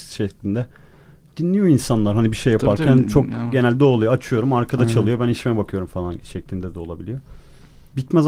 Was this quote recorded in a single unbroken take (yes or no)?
yes